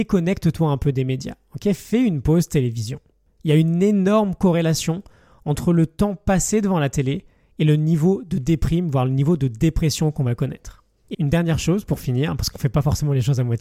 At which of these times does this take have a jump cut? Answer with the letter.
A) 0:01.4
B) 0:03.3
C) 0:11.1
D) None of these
C